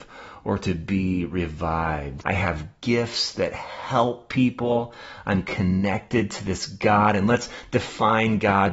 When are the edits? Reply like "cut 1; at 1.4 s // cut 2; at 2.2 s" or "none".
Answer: cut 1; at 2.2 s